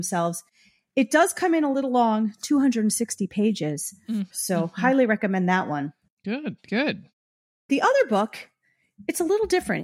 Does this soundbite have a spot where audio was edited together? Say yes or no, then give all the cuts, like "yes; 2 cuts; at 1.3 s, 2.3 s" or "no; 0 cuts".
yes; 1 cut; at 4.3 s